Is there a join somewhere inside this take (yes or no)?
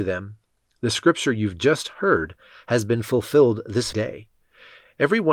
yes